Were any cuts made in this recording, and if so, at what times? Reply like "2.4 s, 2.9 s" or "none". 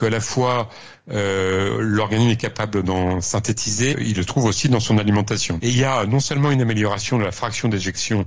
3.9 s, 5.6 s